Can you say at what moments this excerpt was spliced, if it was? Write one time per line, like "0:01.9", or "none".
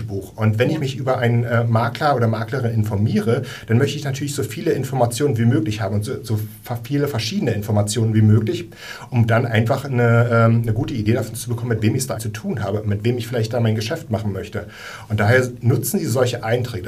0:12.2

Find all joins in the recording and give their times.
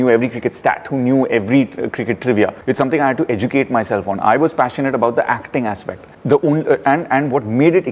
none

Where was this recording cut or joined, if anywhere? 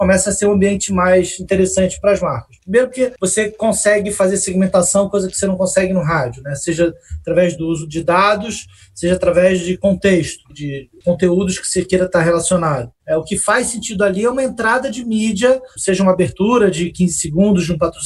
0:13.0
0:15.8

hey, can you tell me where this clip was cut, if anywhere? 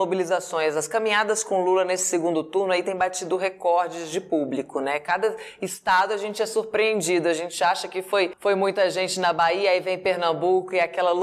none

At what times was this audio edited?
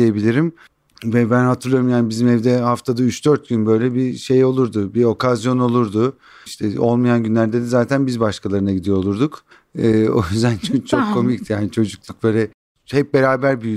none

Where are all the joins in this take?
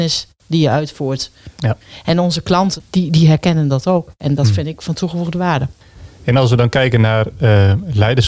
none

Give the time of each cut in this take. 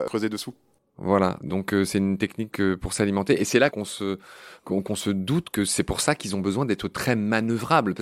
0:03.7

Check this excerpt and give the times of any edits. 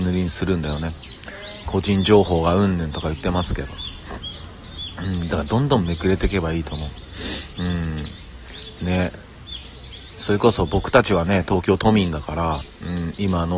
none

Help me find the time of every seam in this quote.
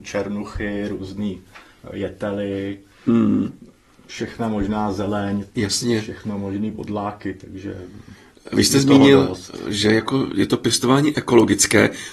0:05.5

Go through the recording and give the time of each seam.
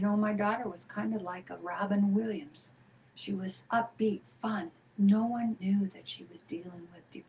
0:05.6

